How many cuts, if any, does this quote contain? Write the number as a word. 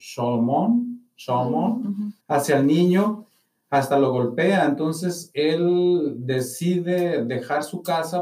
one